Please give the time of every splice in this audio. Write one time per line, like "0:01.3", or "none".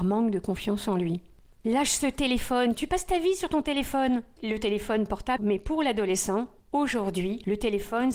0:04.4
0:05.4